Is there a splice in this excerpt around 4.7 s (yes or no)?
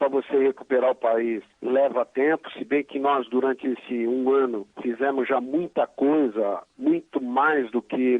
yes